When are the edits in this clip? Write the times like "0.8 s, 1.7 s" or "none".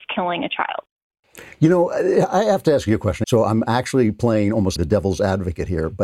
3.2 s, 4.8 s